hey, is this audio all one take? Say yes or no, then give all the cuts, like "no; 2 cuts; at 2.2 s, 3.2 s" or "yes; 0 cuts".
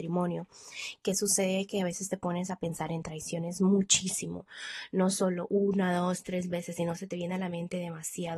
yes; 0 cuts